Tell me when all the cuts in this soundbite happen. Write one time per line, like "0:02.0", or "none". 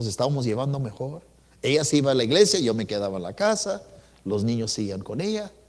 none